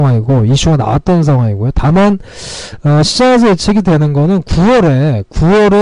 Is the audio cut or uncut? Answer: uncut